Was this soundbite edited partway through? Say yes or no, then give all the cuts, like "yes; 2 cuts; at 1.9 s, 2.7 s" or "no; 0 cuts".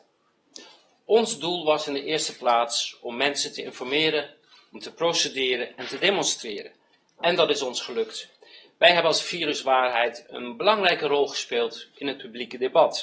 no; 0 cuts